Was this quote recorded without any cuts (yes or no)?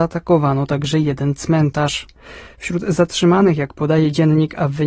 yes